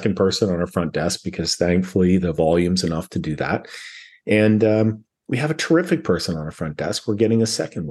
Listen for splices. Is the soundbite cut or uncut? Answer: uncut